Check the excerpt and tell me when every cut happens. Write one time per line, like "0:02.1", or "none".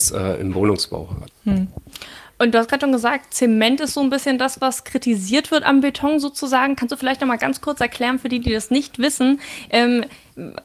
0:01.3